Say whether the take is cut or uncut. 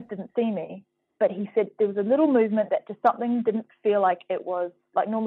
uncut